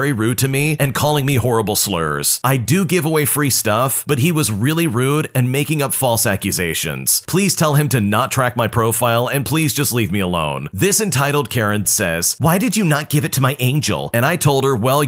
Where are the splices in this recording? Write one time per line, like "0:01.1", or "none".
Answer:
0:11.8
0:14.1